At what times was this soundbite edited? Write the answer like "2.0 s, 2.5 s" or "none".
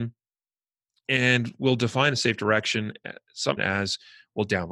3.6 s